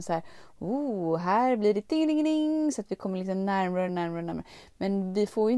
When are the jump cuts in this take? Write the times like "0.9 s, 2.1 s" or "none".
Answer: 3.9 s